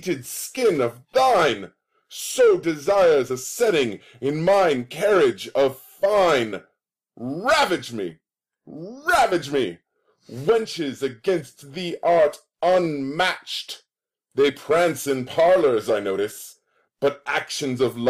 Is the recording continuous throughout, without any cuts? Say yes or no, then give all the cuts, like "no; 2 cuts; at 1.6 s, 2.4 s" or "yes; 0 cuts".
yes; 0 cuts